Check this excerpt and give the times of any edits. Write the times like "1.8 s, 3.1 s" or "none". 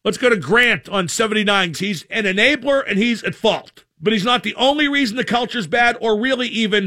1.7 s, 3.9 s

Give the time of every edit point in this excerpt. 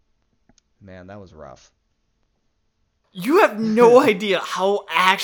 3.0 s

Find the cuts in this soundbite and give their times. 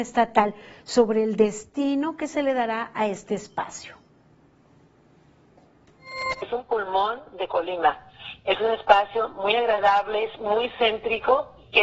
none

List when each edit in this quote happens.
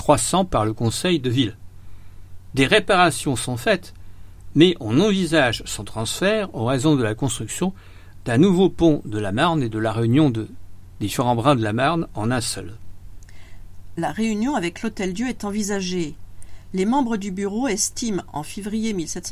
2.5 s

